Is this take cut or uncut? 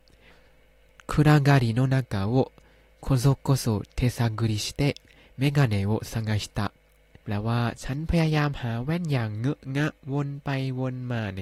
cut